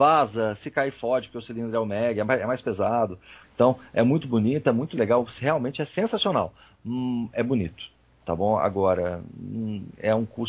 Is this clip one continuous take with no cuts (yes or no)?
no